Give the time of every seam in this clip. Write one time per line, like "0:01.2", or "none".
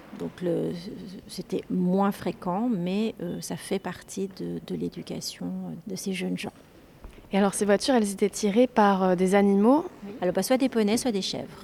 0:10.2